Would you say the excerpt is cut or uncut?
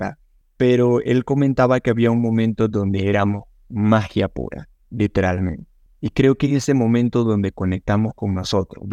uncut